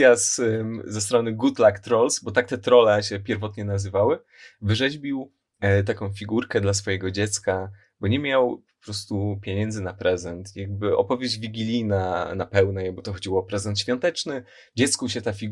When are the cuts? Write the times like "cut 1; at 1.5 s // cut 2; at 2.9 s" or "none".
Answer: none